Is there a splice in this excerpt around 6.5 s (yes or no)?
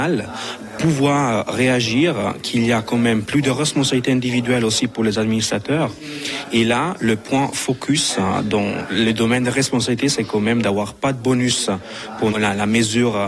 no